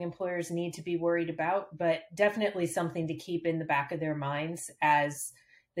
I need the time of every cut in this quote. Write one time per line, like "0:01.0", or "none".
none